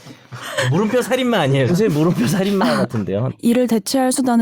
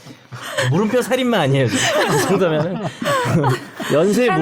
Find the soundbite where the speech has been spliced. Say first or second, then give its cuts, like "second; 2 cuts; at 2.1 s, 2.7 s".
first; 2 cuts; at 1.7 s, 3.3 s